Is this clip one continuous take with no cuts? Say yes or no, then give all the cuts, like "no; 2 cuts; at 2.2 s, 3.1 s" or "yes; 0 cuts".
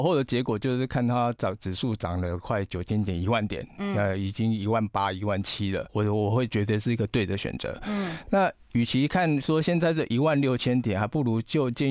no; 1 cut; at 5.9 s